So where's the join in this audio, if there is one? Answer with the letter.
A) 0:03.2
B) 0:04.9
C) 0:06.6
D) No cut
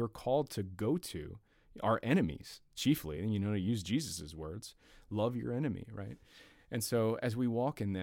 D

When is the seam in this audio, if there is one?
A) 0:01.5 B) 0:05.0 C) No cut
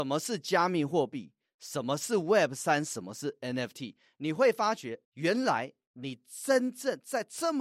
B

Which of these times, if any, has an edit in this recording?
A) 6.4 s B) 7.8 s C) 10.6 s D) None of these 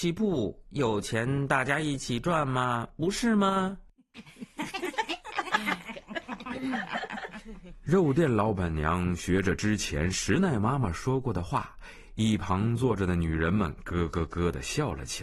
A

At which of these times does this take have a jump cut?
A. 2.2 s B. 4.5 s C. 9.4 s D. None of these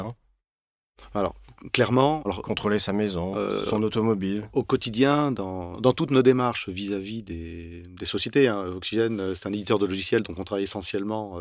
A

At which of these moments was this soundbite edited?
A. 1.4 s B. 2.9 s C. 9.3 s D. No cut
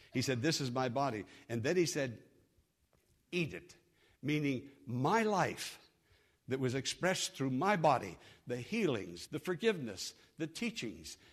C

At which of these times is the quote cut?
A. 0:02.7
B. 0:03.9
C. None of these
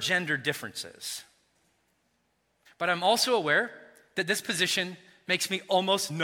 A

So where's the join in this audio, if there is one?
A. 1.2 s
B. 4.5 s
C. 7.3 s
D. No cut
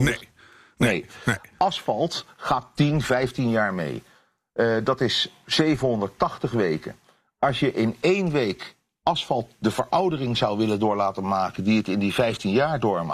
D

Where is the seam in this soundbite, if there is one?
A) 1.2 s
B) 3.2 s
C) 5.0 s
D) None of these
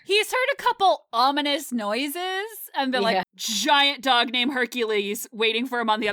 B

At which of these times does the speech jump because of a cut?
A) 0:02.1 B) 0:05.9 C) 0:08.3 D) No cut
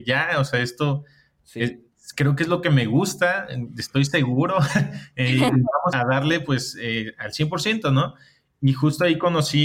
B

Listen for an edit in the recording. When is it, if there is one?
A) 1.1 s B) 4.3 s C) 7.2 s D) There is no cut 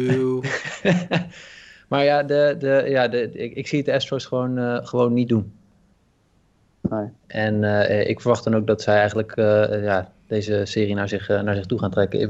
C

